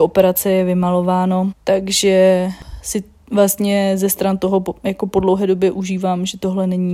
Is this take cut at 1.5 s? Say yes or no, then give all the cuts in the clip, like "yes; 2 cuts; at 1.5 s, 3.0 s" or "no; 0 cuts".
yes; 1 cut; at 1.5 s